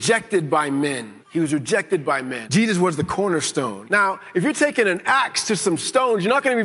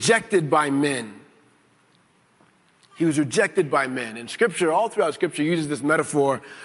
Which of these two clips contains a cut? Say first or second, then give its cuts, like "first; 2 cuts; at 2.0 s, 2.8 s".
first; 3 cuts; at 1.2 s, 2.5 s, 3.8 s